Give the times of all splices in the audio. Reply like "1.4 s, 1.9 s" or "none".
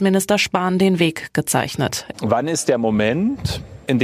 2.1 s

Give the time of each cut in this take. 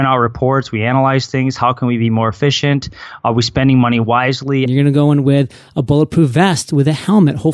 4.7 s

